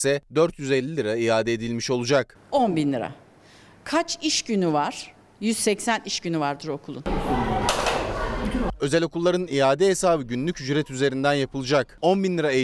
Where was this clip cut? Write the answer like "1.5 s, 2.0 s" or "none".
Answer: 2.3 s

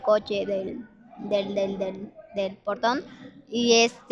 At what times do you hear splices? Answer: none

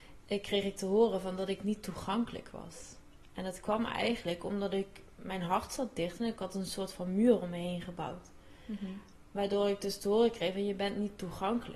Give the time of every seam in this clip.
none

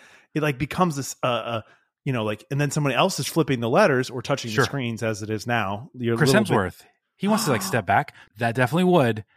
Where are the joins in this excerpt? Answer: 8.3 s

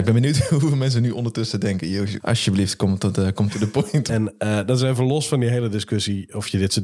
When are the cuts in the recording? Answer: 2.2 s, 4.1 s

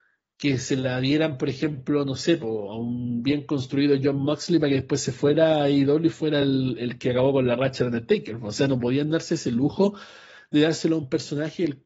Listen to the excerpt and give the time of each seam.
none

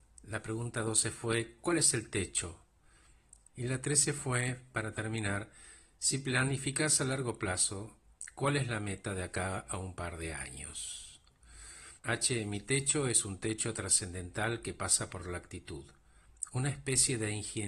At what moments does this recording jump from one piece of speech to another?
3.5 s, 12.0 s

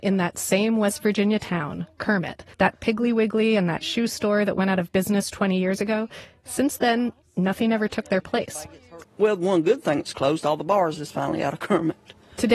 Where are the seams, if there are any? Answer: 2.5 s, 9.0 s

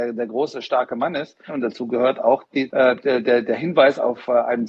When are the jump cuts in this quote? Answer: 1.5 s, 2.7 s

